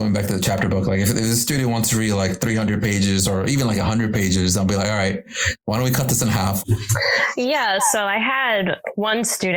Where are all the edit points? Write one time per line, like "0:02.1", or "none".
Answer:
0:06.6